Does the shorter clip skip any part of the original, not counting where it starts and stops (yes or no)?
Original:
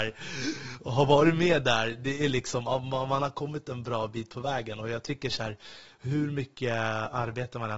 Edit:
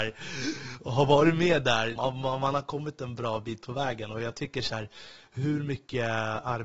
yes